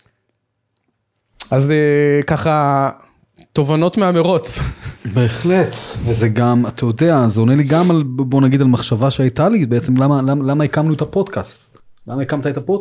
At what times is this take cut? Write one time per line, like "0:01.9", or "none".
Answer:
none